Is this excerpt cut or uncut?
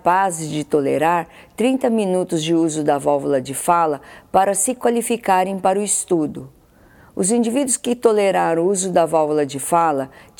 uncut